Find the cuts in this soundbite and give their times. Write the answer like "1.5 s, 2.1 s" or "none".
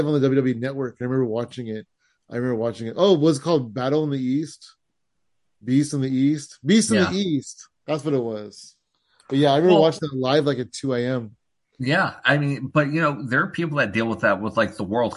none

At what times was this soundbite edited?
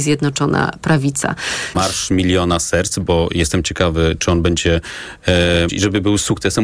1.7 s, 5.7 s

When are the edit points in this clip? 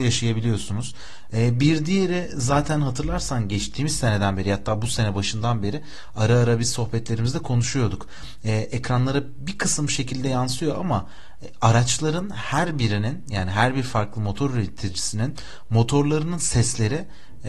1.3 s

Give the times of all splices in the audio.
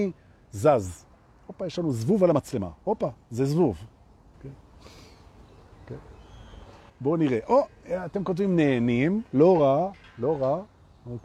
4.3 s, 6.9 s

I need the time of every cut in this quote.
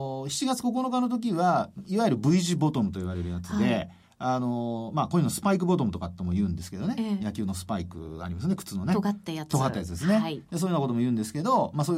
none

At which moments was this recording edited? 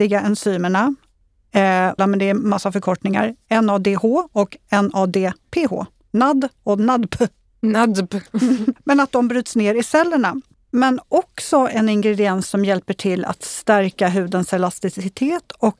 2.0 s, 8.8 s, 10.5 s

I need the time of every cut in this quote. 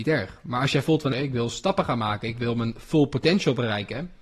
1.1 s

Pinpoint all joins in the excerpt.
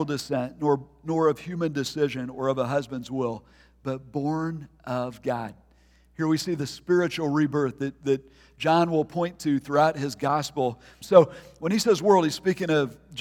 11.0 s

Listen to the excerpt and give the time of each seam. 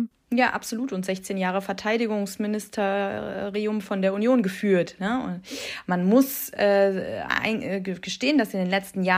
5.8 s

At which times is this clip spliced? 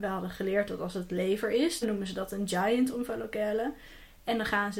1.8 s

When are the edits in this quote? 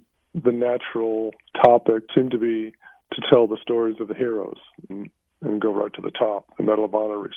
2.1 s, 4.9 s

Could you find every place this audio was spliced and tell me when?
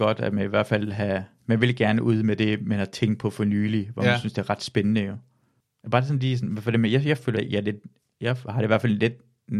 5.8 s, 7.3 s

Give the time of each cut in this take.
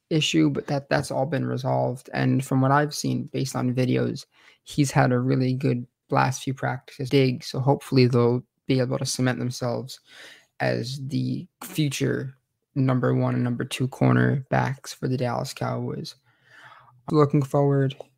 7.1 s, 11.5 s, 17.1 s

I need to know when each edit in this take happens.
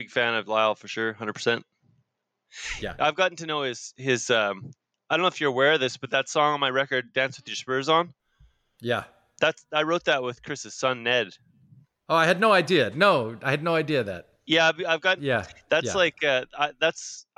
3.0 s, 15.2 s

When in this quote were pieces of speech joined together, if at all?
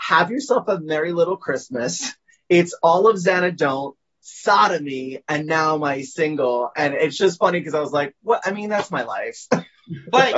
none

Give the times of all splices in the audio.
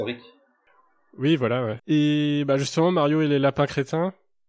1.8 s

